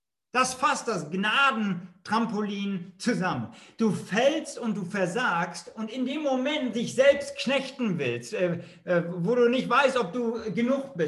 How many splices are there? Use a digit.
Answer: 1